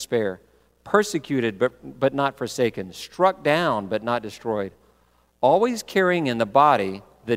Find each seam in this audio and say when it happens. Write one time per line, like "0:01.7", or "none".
none